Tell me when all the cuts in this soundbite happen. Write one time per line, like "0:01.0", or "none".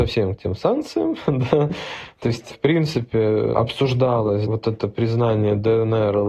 none